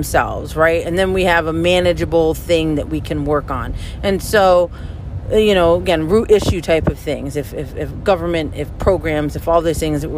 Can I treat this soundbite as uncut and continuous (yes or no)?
yes